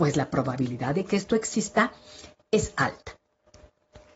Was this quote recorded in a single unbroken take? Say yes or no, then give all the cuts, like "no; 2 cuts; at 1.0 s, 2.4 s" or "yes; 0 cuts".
yes; 0 cuts